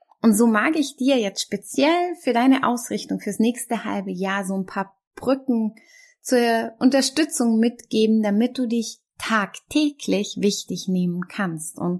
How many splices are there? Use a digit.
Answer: 0